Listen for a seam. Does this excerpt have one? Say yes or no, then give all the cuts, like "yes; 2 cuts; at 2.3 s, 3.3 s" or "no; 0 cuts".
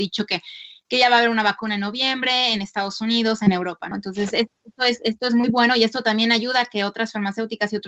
yes; 1 cut; at 3.9 s